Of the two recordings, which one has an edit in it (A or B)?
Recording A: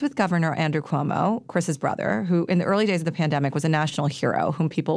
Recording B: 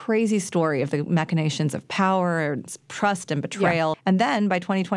B